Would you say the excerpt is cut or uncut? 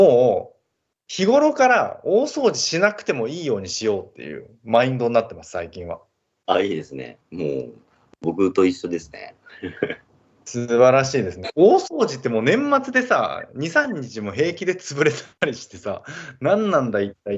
uncut